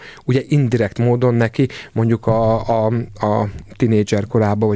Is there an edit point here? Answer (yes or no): no